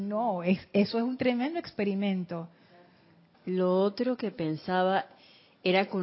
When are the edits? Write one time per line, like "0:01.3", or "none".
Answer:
0:03.3